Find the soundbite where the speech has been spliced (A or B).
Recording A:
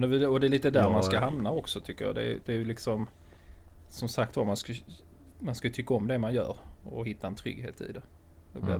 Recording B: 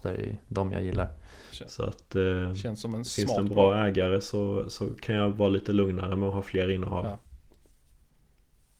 B